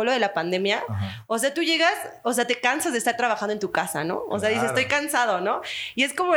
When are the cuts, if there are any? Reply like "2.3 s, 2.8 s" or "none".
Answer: none